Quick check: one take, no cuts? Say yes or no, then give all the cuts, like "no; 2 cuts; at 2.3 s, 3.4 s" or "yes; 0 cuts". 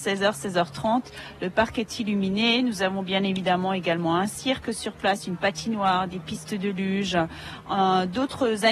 yes; 0 cuts